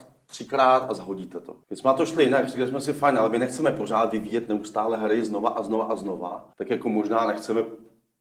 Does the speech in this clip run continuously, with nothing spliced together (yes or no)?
no